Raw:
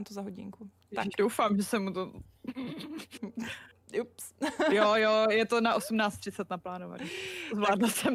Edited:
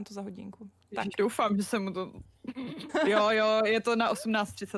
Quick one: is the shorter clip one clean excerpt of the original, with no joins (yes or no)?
no